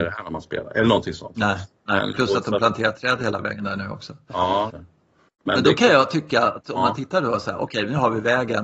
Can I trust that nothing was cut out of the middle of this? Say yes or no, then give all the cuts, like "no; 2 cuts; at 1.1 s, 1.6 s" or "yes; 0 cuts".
no; 1 cut; at 4.7 s